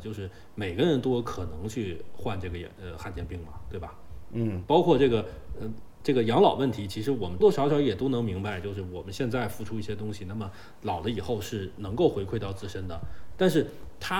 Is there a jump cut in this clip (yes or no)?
yes